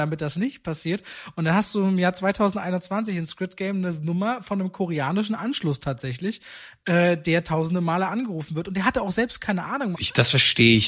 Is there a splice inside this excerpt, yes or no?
yes